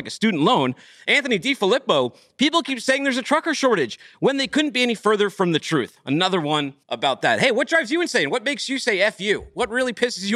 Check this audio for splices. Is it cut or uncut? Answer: cut